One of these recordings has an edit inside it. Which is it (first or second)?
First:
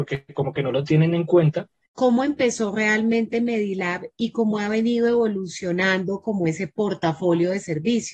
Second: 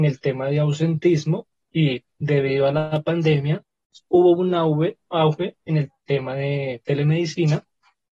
first